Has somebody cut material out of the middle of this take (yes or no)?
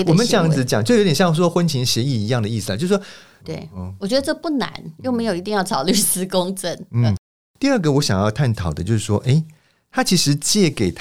yes